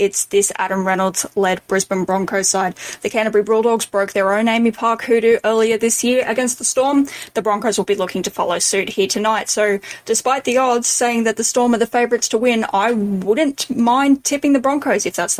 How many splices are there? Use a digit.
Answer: 0